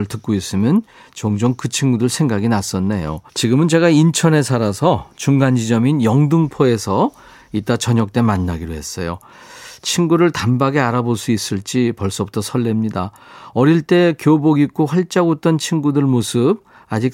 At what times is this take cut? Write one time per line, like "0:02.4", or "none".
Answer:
0:03.3